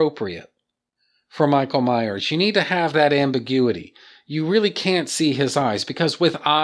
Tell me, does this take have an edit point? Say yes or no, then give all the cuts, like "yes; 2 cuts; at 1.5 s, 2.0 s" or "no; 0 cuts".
no; 0 cuts